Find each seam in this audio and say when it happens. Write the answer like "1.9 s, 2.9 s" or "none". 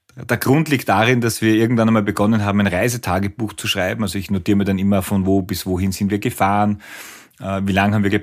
none